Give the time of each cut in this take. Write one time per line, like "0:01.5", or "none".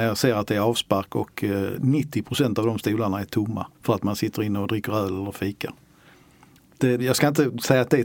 0:03.7
0:07.0